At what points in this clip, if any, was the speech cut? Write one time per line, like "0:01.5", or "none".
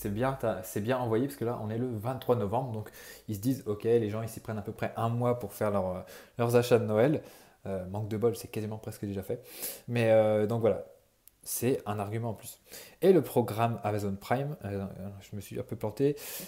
none

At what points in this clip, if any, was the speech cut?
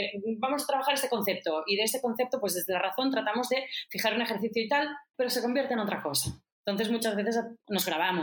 0:05.1
0:06.6

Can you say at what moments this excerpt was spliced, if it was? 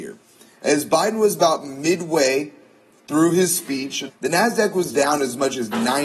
0:04.1

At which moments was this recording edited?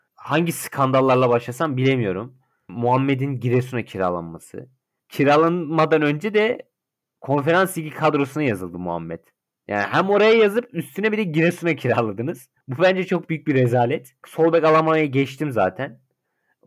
0:12.6

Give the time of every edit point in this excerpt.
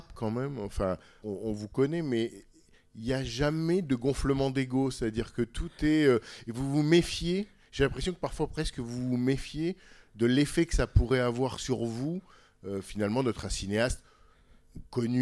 0:01.2

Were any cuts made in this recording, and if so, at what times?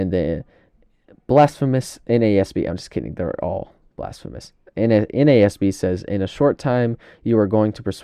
none

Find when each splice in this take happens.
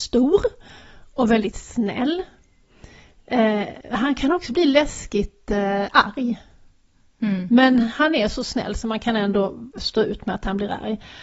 none

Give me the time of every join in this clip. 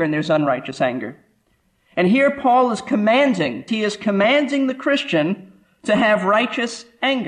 0:03.7

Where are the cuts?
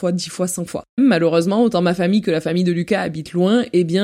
0:01.0

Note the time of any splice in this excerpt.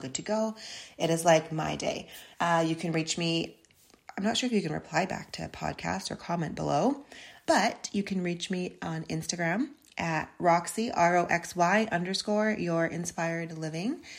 0:02.3
0:07.5

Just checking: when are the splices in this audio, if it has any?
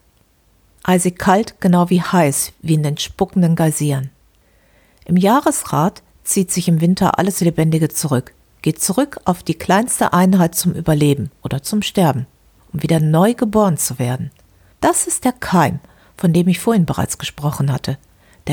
0:14.7

